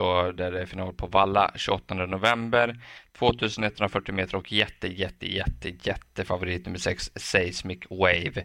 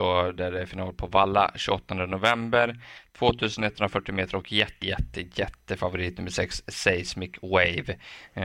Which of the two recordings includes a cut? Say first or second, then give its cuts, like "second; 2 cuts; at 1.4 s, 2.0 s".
second; 1 cut; at 4.8 s